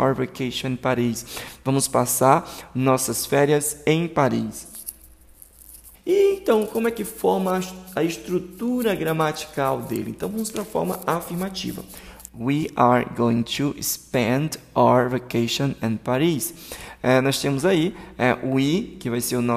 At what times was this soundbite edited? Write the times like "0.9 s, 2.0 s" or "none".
5.9 s, 12.3 s

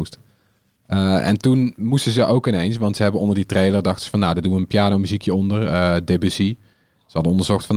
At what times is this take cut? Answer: none

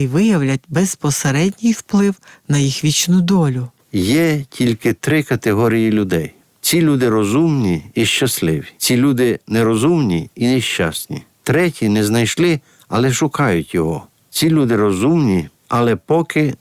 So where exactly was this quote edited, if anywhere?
6.5 s, 8.8 s

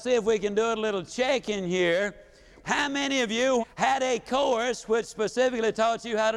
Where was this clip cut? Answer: 3.6 s

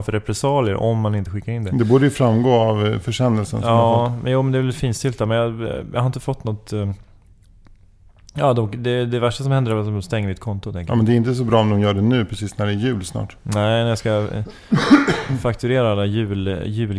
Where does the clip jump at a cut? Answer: none

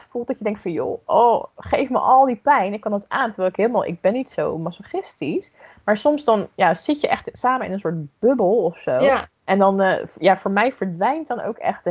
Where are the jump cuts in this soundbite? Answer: none

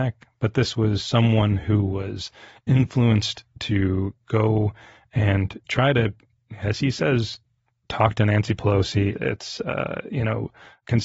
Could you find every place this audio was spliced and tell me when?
9.1 s

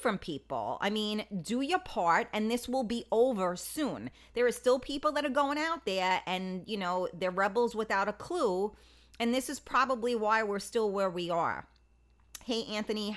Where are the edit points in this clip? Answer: none

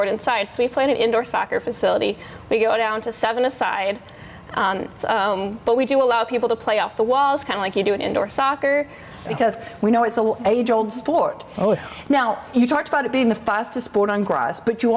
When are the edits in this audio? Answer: 5.0 s, 9.2 s

